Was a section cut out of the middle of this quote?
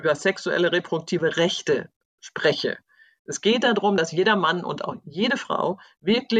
no; 0 cuts

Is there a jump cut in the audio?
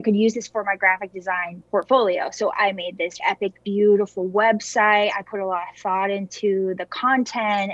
yes; 1 cut; at 3.2 s

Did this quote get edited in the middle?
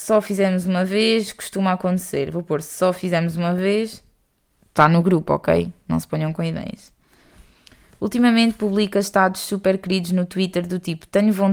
no; 0 cuts

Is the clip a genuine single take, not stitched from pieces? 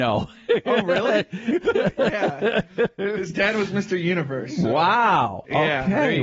yes; 0 cuts

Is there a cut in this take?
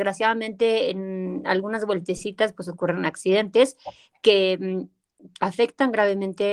yes; 1 cut; at 5.4 s

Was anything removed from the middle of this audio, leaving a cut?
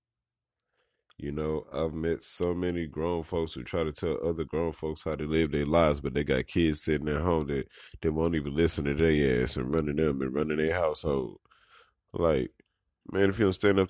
no; 0 cuts

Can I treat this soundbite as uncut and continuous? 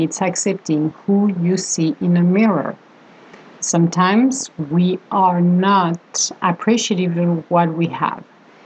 yes; 0 cuts

